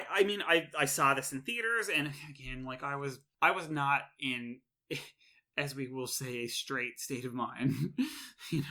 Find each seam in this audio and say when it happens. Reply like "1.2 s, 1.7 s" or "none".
none